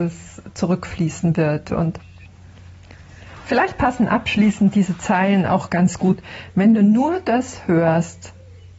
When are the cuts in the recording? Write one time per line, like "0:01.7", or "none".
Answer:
none